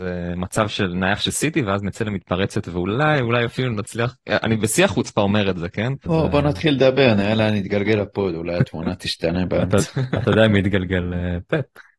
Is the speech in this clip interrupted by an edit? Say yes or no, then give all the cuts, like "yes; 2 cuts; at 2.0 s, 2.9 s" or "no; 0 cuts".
yes; 1 cut; at 6.1 s